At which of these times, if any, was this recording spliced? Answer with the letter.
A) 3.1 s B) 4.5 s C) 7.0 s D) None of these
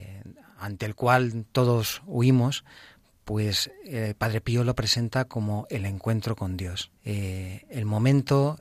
C